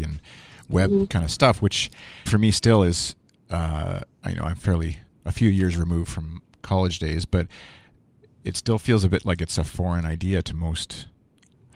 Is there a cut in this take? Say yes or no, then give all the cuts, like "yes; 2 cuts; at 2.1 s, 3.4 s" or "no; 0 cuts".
yes; 1 cut; at 2.3 s